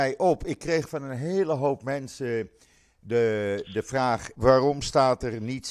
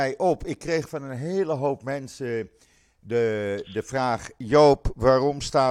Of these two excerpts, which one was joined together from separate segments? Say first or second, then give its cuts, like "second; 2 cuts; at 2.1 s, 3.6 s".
first; 1 cut; at 4.4 s